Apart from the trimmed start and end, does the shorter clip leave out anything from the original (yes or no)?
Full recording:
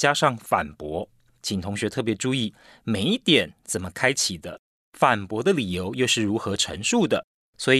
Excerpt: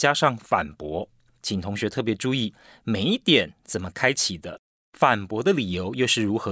no